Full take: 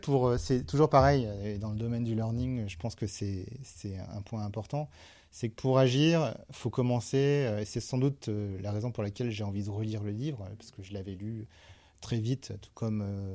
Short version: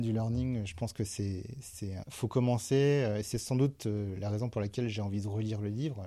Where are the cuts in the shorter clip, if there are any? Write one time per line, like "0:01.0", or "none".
0:02.0